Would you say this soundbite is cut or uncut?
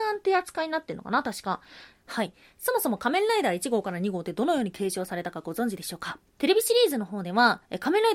cut